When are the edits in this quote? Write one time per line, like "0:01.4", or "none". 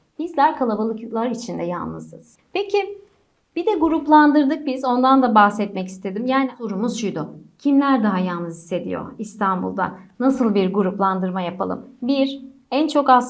0:02.4